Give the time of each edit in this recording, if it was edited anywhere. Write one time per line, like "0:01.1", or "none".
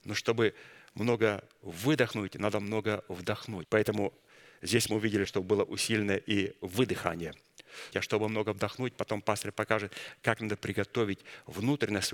0:03.6
0:05.2
0:07.9